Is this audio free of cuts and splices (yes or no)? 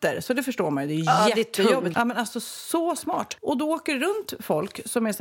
no